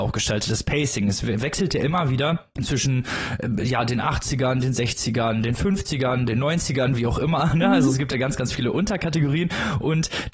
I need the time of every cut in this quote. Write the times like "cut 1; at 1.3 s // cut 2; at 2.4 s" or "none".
cut 1; at 2.5 s